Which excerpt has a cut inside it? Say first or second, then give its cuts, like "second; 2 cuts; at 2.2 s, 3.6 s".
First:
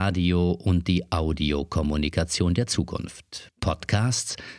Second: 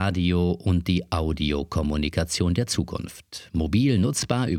first; 1 cut; at 3.5 s